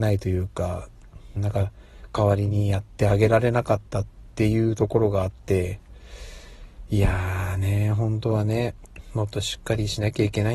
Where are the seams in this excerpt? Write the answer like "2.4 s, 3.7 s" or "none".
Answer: 1.4 s

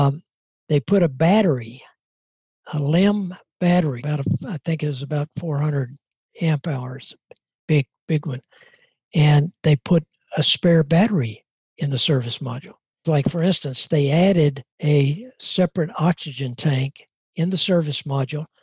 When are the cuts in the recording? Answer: 4.0 s, 13.0 s, 14.7 s

